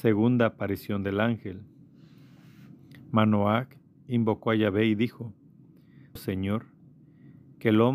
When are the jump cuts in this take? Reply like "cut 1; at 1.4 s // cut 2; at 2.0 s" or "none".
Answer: cut 1; at 6.2 s